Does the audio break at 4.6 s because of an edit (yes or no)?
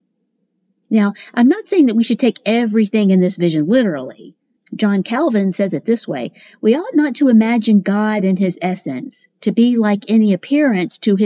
yes